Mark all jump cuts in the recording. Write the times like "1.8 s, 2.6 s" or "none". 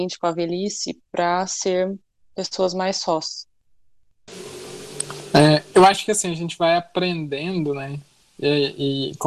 5.7 s